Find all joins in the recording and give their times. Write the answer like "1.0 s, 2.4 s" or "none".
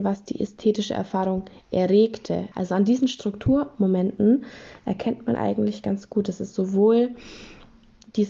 2.5 s